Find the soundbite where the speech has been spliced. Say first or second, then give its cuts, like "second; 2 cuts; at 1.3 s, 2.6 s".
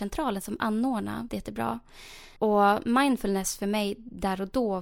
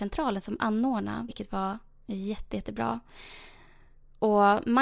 first; 2 cuts; at 1.3 s, 2.4 s